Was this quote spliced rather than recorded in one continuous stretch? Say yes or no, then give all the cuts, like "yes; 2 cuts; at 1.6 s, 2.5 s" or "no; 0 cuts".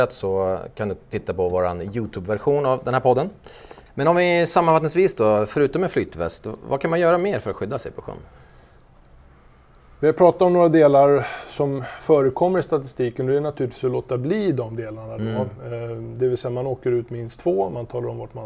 yes; 1 cut; at 3.9 s